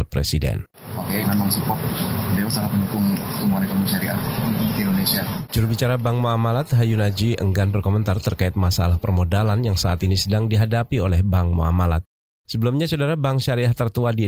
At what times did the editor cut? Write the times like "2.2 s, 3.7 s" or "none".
1.2 s